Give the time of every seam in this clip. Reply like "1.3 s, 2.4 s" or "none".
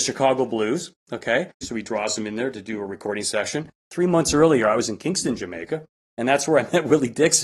1.6 s, 3.8 s